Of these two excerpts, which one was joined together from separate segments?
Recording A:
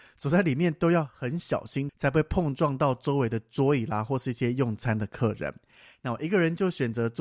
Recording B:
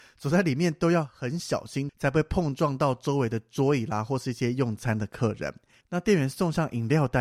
B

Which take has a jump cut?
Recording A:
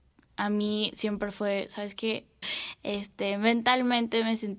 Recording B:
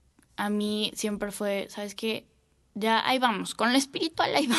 A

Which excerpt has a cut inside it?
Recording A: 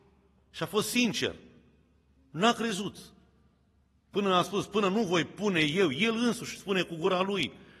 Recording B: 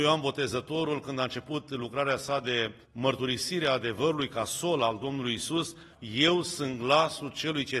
B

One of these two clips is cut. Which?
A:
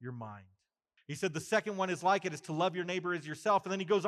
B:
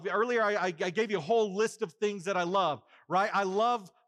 A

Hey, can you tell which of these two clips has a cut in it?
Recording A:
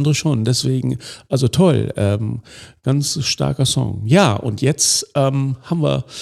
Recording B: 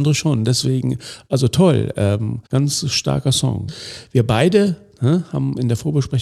B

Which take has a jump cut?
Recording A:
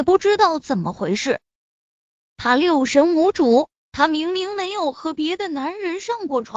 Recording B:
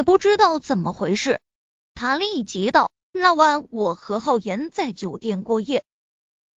B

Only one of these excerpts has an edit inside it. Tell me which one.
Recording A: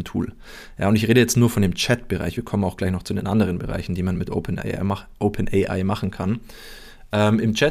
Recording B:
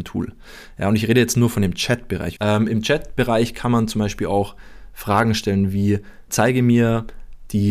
B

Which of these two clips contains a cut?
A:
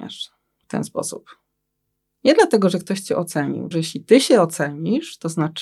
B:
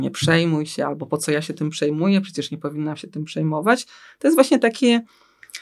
A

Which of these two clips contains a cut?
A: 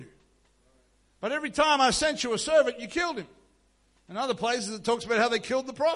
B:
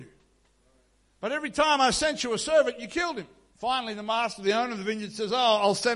B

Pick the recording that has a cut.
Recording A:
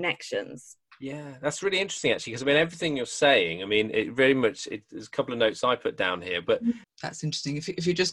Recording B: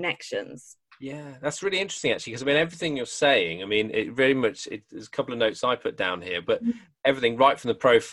A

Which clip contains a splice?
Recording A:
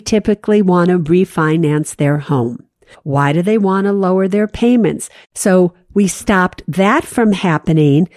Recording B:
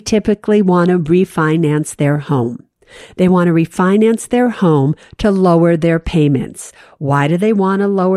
A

